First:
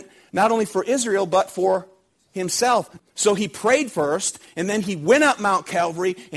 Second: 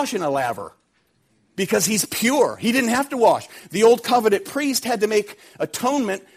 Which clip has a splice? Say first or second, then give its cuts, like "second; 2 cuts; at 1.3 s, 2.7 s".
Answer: first; 1 cut; at 3.0 s